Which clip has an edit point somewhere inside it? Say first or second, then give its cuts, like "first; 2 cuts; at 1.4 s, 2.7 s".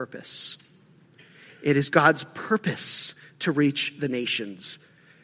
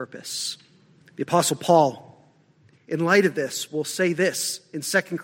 second; 1 cut; at 1.0 s